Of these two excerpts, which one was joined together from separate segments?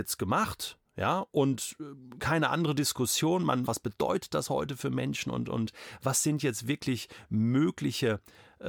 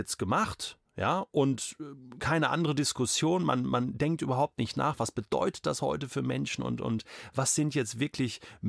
first; 1 cut; at 3.6 s

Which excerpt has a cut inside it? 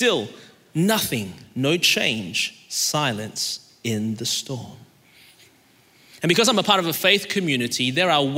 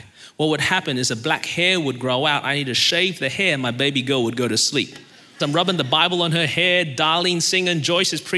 second; 1 cut; at 5.4 s

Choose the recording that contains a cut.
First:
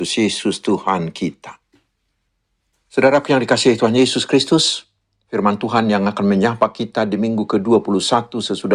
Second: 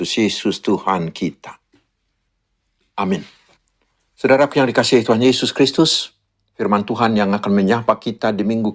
first; 1 cut; at 2.7 s

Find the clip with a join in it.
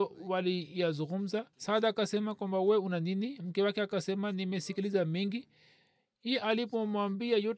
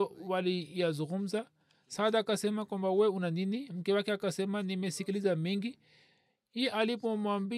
first; 1 cut; at 1.5 s

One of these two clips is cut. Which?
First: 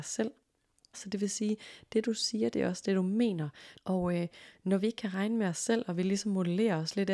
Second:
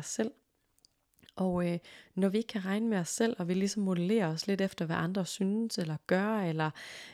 first; 2 cuts; at 0.9 s, 3.8 s

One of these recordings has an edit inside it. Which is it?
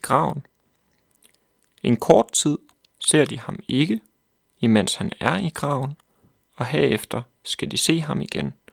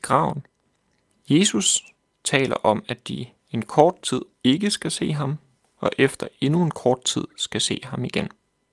second; 2 cuts; at 1.1 s, 4.3 s

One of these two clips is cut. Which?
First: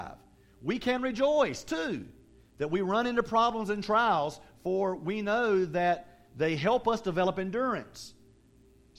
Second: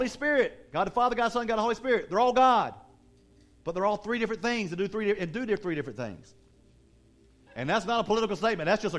second; 1 cut; at 7.5 s

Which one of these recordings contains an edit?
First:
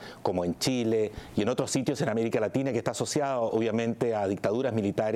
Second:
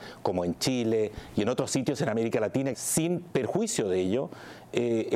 second; 1 cut; at 2.7 s

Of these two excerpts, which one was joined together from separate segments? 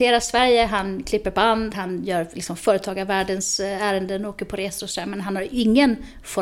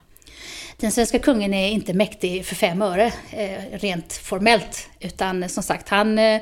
first; 1 cut; at 1.7 s

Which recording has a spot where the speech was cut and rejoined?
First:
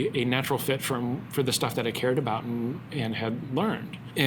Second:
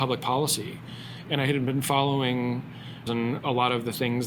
second; 2 cuts; at 1.2 s, 3.1 s

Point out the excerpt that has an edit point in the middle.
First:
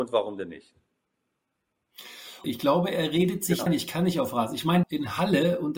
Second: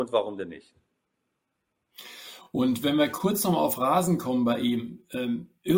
first; 3 cuts; at 2.4 s, 3.7 s, 4.8 s

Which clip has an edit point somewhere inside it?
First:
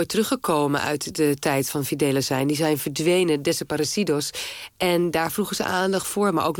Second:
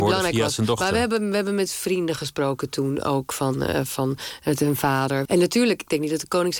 second; 1 cut; at 5.3 s

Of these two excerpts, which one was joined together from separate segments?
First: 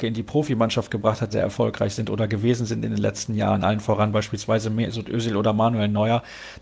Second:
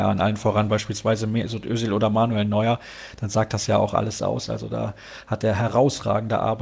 first; 1 cut; at 1.3 s

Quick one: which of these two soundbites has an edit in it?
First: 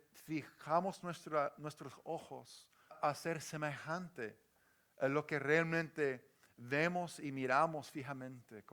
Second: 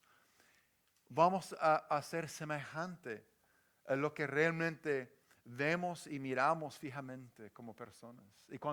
first; 1 cut; at 2.9 s

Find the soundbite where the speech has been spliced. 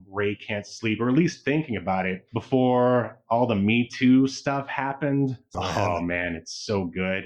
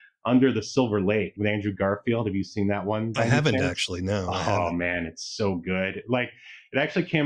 first; 1 cut; at 5.5 s

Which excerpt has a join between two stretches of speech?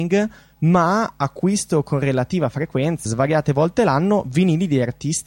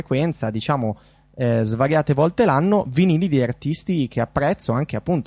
first; 1 cut; at 3.1 s

